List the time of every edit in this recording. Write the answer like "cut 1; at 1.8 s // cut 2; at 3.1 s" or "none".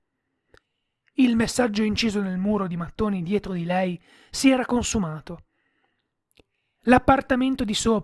none